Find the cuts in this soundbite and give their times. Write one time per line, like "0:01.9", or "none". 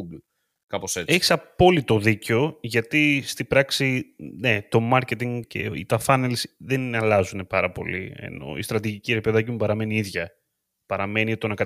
0:05.4